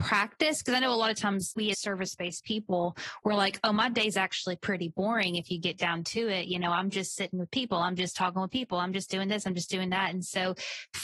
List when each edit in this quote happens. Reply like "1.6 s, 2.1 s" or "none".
1.7 s